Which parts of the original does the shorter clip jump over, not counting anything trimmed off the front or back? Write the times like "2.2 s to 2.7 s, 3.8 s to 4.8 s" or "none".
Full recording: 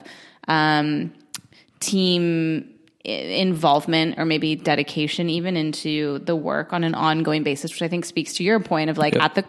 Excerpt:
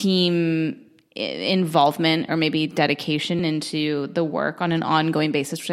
5.3 s to 5.5 s